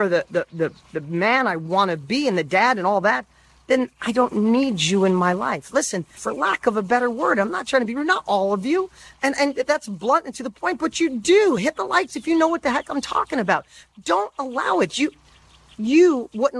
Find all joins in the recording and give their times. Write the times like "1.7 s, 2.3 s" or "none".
6.2 s